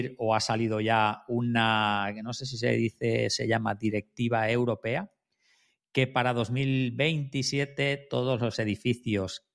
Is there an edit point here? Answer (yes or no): no